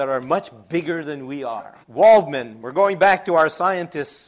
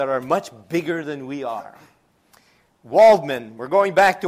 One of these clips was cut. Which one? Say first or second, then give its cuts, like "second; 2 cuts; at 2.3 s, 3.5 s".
first; 1 cut; at 1.8 s